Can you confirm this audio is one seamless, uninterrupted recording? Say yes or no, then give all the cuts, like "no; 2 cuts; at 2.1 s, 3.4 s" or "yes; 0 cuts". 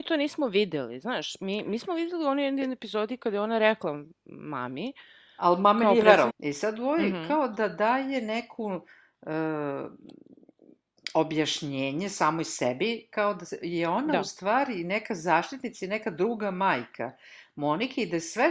no; 1 cut; at 6.3 s